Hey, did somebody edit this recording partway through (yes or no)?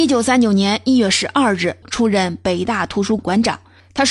yes